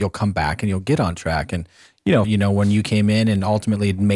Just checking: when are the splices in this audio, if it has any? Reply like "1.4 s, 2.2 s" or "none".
2.2 s